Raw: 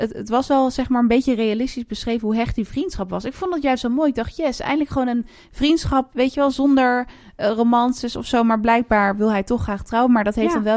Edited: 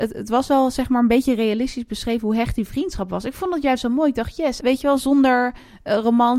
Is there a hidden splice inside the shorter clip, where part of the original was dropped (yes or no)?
yes